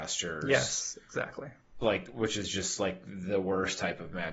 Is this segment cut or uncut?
uncut